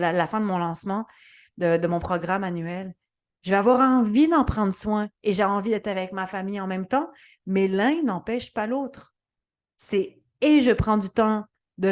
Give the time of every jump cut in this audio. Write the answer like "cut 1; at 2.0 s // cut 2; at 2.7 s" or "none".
none